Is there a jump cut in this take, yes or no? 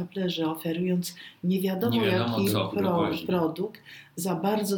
no